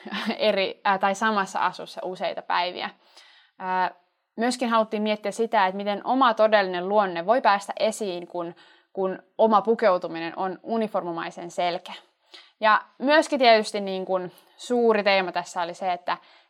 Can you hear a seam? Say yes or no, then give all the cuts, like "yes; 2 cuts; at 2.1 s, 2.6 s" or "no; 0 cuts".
no; 0 cuts